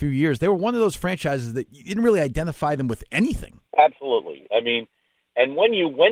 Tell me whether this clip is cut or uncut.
cut